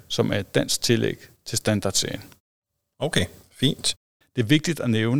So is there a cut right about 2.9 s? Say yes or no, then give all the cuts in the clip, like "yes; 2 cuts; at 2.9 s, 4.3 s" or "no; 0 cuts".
no; 1 cut; at 4.2 s